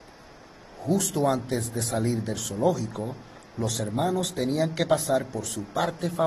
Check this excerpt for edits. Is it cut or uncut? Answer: uncut